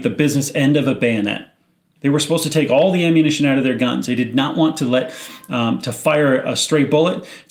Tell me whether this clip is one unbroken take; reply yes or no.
no